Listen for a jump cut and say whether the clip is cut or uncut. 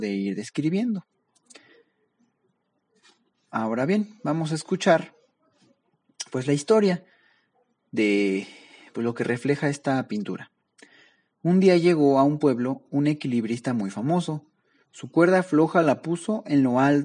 uncut